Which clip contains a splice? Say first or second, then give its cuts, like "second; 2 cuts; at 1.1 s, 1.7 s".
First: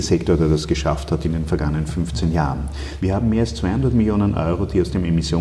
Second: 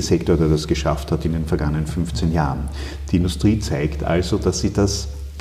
first; 1 cut; at 3.0 s